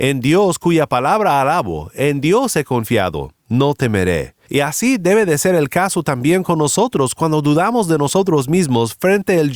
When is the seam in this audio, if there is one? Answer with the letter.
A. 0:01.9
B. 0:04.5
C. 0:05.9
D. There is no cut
B